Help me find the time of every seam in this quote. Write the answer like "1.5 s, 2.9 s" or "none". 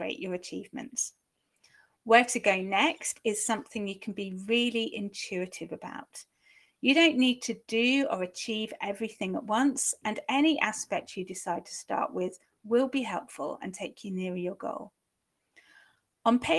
none